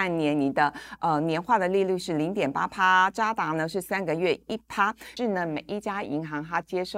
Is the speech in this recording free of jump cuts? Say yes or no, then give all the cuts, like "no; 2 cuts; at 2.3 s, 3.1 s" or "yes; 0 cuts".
no; 1 cut; at 5.2 s